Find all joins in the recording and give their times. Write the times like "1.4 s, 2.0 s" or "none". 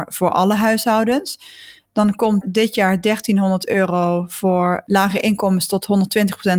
2.4 s